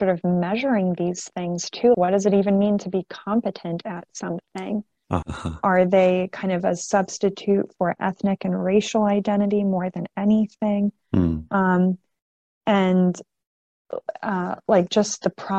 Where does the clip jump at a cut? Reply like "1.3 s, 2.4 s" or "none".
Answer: 1.9 s, 5.2 s